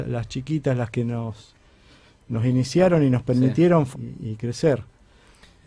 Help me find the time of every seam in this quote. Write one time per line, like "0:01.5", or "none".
0:03.9